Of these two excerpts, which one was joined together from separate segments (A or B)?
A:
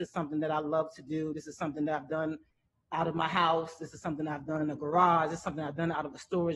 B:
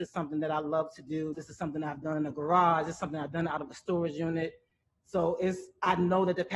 B